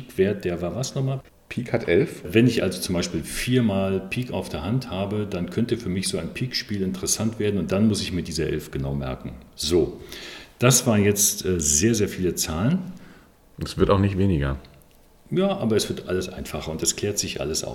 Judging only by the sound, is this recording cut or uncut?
uncut